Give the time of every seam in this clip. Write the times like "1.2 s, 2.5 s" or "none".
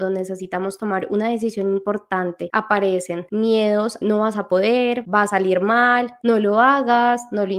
4.0 s, 6.2 s